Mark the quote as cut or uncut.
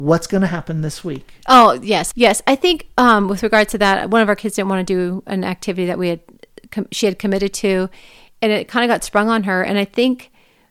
cut